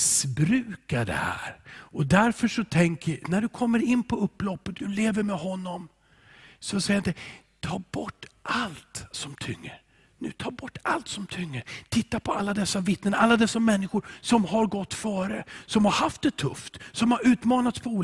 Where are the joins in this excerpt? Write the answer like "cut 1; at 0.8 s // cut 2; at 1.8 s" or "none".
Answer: cut 1; at 3.2 s // cut 2; at 4.7 s